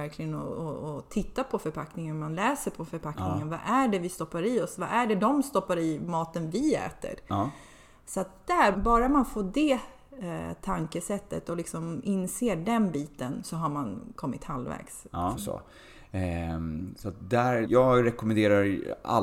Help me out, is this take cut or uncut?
cut